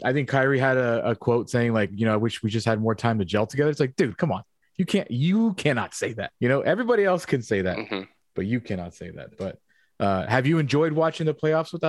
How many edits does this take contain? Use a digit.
1